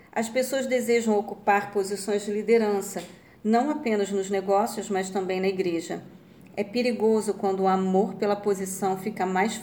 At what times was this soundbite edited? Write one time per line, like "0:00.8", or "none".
none